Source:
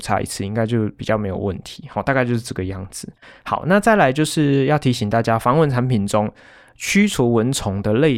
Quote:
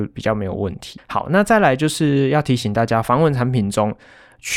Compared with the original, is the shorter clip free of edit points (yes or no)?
no